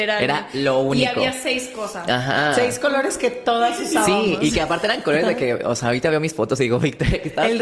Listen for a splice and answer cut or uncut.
uncut